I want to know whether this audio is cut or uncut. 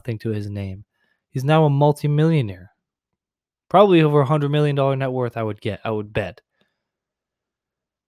uncut